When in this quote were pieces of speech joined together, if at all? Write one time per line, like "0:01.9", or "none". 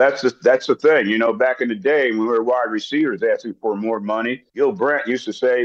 0:04.5